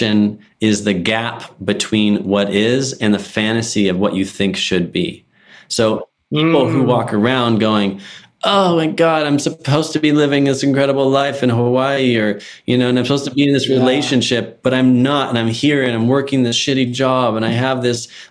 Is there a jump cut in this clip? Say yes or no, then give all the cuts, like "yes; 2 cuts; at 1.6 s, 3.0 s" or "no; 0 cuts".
no; 0 cuts